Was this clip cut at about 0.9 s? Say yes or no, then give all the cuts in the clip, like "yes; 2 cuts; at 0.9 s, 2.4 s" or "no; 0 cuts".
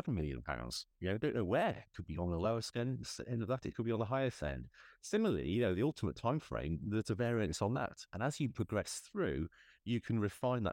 no; 0 cuts